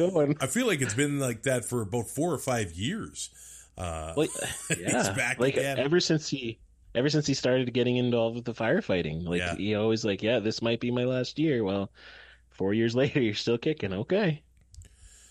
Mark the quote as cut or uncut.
uncut